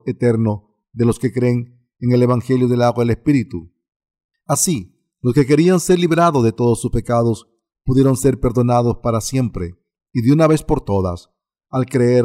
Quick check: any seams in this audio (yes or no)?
no